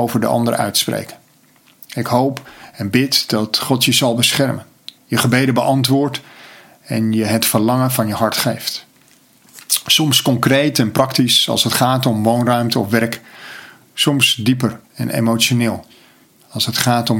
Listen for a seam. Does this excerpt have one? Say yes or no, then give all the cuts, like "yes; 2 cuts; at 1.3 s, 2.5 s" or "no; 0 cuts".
yes; 2 cuts; at 5.0 s, 14.8 s